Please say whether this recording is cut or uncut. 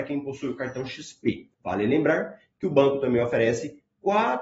cut